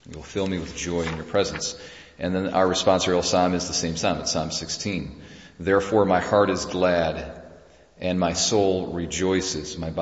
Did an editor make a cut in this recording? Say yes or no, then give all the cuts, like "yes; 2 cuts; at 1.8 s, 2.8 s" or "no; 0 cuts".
no; 0 cuts